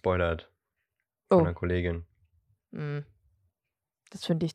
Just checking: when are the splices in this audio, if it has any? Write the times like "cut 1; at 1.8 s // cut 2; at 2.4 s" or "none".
none